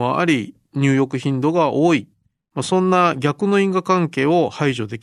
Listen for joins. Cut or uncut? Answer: uncut